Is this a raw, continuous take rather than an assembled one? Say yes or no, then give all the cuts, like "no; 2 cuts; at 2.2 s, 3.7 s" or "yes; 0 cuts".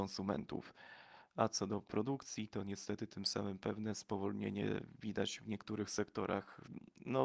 yes; 0 cuts